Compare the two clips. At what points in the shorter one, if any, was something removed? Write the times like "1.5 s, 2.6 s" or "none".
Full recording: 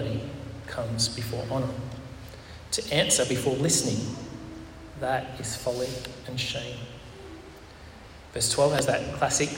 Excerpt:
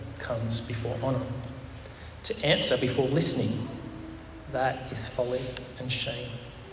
none